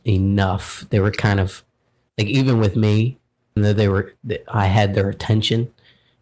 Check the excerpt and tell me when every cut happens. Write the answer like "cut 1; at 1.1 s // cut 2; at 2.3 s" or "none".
cut 1; at 3.6 s